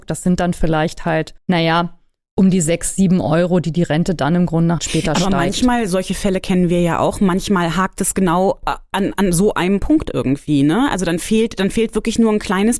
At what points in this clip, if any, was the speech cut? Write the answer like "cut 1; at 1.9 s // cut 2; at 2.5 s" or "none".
cut 1; at 1.4 s // cut 2; at 4.8 s